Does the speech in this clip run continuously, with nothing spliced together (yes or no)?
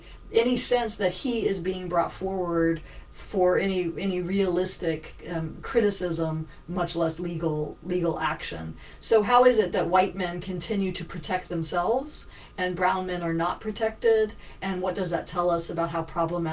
yes